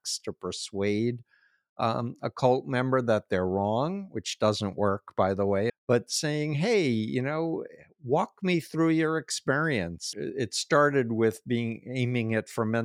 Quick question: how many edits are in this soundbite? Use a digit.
2